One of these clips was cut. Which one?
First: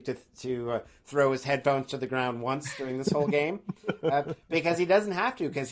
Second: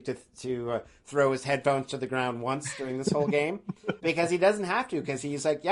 second; 1 cut; at 4.0 s

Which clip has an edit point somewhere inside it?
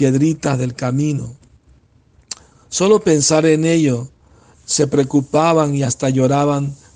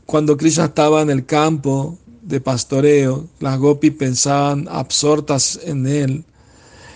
first; 1 cut; at 4.5 s

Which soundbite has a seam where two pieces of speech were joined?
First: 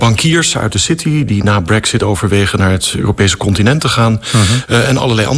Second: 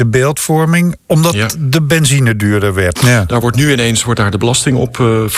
second; 2 cuts; at 1.0 s, 3.0 s

